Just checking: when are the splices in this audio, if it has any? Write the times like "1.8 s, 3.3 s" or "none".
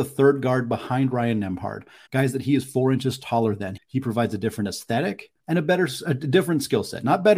2.1 s, 3.8 s, 5.4 s